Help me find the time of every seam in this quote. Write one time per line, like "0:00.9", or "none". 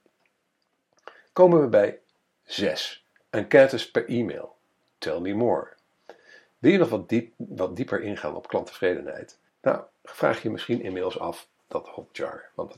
0:09.5
0:11.6